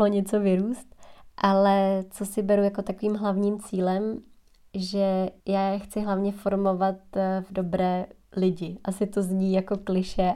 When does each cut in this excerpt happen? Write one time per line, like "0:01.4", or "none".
0:05.4